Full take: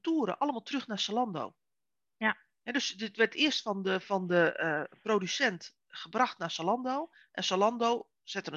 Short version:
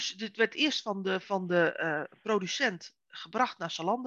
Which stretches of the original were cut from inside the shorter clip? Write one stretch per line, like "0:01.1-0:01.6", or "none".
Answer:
none